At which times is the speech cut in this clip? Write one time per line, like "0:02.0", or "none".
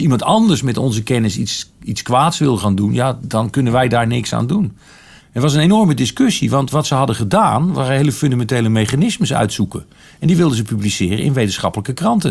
0:05.2